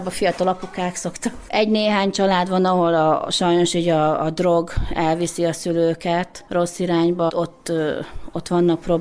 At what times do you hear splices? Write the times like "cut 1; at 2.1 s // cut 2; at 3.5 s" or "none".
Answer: cut 1; at 1.5 s // cut 2; at 7.3 s